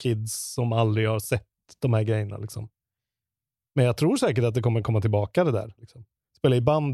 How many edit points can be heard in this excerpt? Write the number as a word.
one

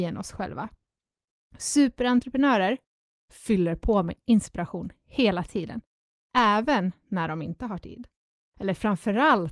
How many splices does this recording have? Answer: zero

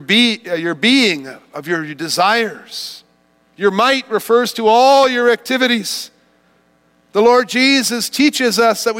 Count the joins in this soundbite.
one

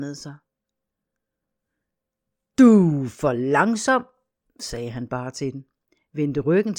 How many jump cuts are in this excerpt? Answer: zero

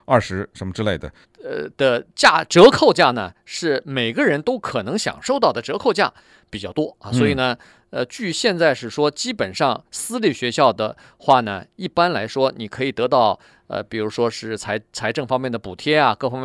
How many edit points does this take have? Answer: one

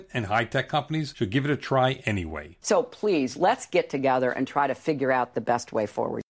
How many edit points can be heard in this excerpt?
one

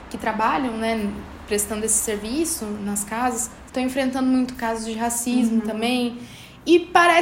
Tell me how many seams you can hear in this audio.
one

